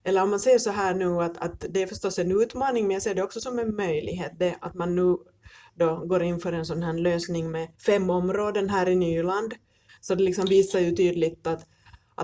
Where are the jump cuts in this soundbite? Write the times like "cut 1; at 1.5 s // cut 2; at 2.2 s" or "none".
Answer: cut 1; at 7.7 s // cut 2; at 9.9 s